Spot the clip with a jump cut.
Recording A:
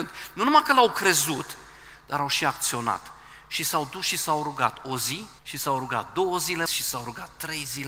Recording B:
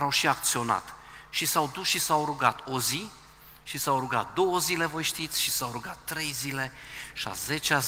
A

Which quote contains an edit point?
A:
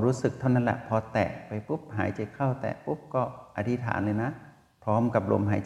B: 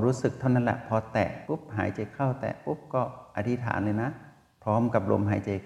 B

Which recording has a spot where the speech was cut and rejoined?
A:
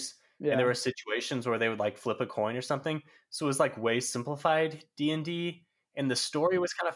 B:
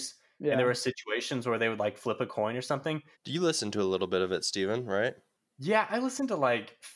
B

